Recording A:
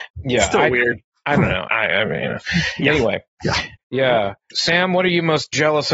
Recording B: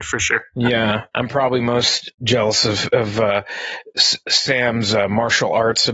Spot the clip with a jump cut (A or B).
A